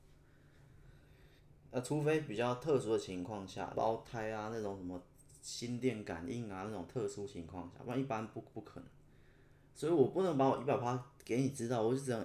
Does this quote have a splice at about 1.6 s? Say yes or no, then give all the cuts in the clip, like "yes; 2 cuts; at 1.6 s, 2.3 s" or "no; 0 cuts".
no; 1 cut; at 3.7 s